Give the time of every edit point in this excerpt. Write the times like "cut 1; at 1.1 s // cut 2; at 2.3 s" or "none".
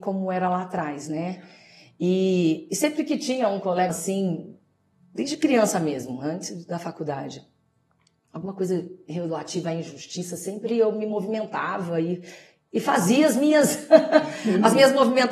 cut 1; at 3.9 s